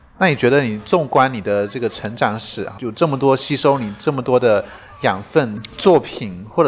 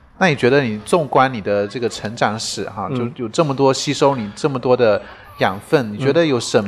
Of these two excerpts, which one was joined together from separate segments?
first; 2 cuts; at 2.8 s, 5.6 s

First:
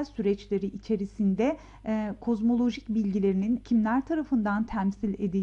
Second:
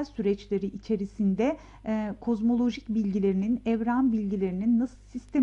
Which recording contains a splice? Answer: first; 1 cut; at 3.6 s

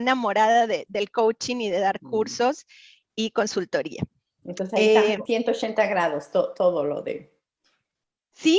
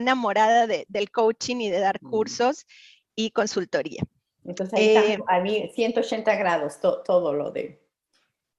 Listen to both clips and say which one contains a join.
first; 1 cut; at 5.3 s

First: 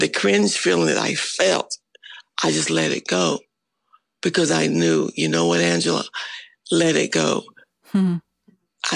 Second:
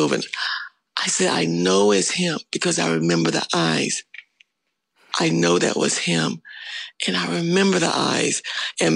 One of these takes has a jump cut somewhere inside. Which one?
second; 1 cut; at 5.1 s

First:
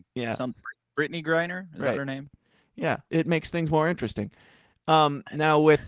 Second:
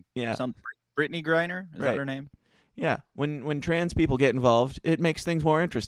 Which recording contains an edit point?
first; 1 cut; at 3.1 s

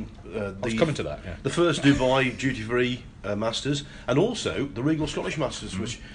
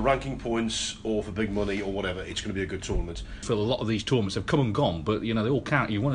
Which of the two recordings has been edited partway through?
second; 1 cut; at 3.4 s

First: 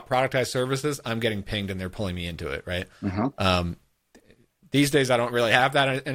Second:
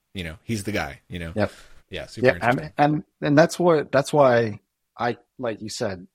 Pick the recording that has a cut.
second; 1 cut; at 1.8 s

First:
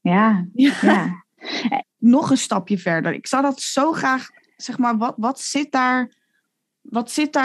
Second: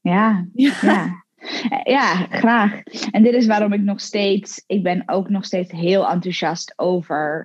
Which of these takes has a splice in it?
first; 1 cut; at 1.8 s

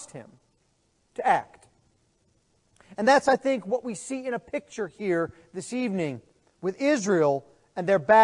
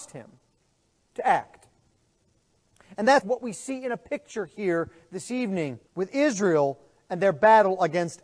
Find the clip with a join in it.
second; 2 cuts; at 3.2 s, 5.9 s

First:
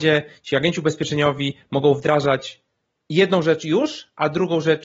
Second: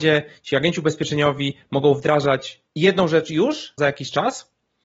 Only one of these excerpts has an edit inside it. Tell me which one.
second; 2 cuts; at 2.7 s, 3.8 s

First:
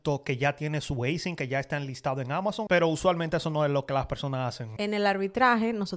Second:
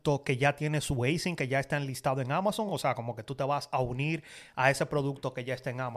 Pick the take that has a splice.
first; 2 cuts; at 2.7 s, 4.8 s

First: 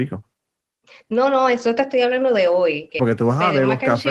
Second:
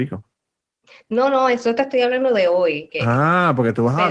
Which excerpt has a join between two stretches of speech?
first; 1 cut; at 3.0 s

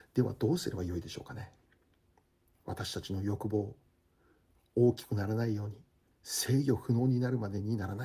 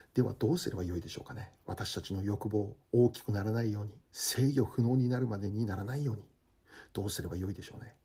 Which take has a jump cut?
second; 3 cuts; at 1.6 s, 2.8 s, 4.0 s

